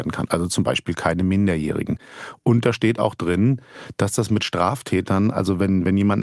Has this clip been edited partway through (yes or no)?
no